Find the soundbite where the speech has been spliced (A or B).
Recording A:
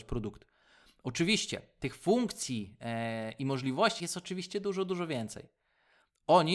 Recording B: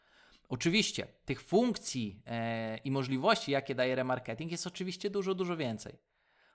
A